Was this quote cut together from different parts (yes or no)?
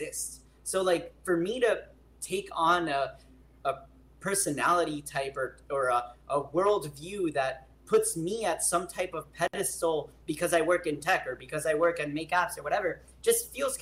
no